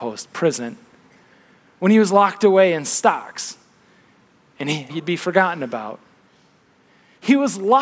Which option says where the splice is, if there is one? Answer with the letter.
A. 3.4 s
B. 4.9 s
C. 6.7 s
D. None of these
B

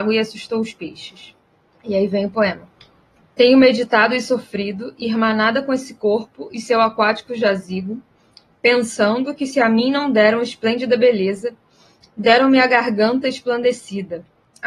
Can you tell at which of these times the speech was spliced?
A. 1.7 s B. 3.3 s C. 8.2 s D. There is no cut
D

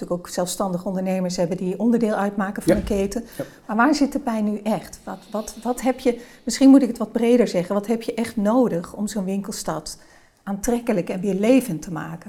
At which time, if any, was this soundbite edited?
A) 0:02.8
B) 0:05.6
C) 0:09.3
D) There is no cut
D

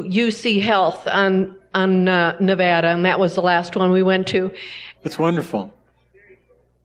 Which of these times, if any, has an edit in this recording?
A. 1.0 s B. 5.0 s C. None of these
B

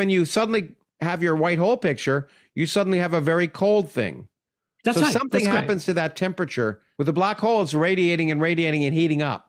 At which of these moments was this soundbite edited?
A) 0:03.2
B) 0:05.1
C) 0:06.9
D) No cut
C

